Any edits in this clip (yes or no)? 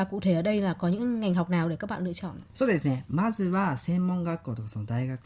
yes